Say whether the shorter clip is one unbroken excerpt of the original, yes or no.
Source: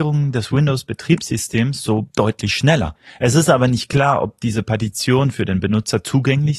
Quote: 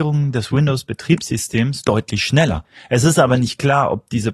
no